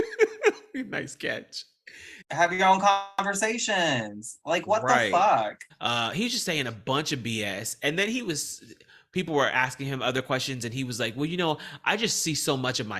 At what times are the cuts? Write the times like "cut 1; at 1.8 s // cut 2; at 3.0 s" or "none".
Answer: cut 1; at 2.2 s // cut 2; at 5.7 s